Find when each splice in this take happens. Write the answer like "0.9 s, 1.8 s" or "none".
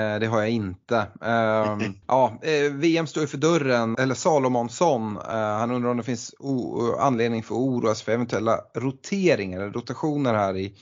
2.0 s, 3.9 s